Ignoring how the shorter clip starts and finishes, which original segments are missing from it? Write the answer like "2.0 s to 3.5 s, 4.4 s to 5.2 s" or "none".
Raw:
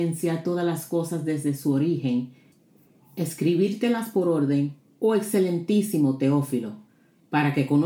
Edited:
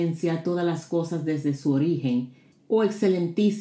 2.6 s to 4.9 s

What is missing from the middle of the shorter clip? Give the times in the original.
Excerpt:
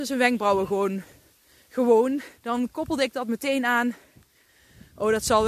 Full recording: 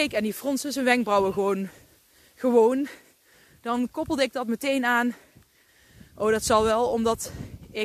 3.0 s to 3.6 s

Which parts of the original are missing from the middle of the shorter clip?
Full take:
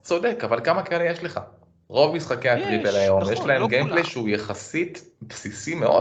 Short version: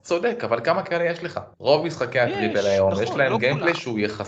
1.5 s to 1.8 s

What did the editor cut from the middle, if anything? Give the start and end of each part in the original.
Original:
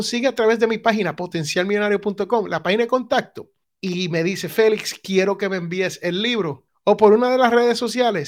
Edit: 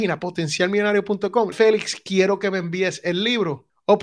2.5 s to 4.5 s

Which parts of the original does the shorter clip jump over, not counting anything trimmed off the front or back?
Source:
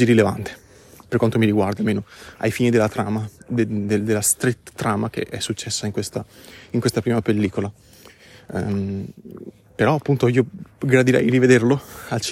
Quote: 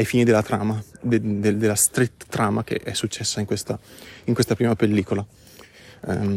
none

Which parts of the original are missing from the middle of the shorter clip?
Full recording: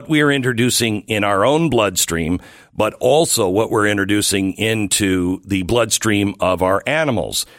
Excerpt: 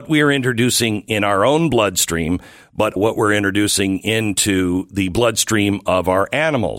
3.0 s to 3.5 s

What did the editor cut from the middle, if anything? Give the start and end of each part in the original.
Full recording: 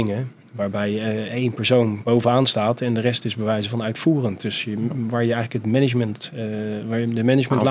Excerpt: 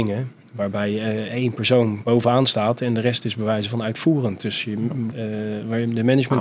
5.1 s to 6.3 s

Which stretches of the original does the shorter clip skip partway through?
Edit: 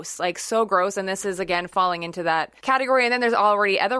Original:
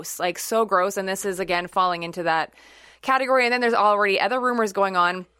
2.6 s to 3.0 s

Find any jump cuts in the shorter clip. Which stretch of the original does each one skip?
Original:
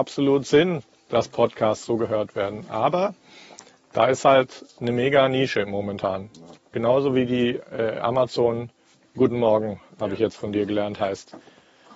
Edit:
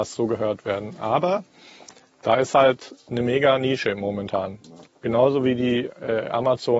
none

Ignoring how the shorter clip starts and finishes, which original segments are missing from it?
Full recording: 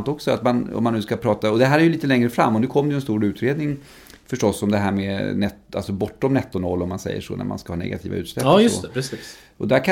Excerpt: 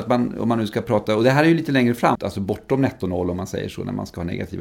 2.5 s to 5.7 s

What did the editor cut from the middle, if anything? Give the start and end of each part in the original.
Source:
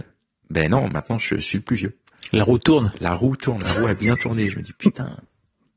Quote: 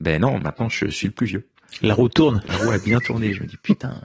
3.0 s to 3.6 s

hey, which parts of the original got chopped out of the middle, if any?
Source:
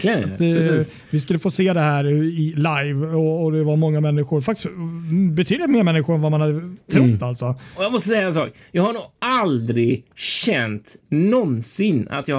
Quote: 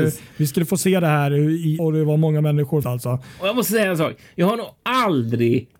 2.5 s to 3.4 s, 4.4 s to 7.2 s

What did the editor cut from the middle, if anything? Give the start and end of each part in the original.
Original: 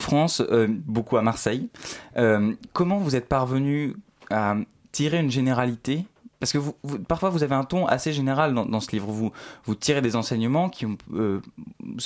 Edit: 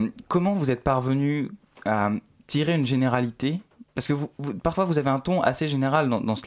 none

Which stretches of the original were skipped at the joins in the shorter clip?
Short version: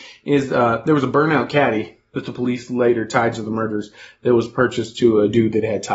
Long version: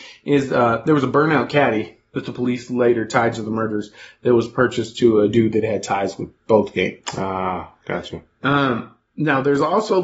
none

